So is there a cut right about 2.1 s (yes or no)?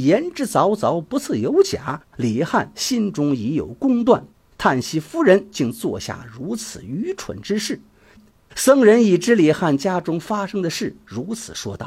no